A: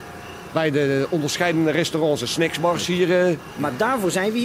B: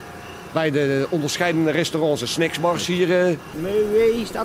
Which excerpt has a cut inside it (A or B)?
B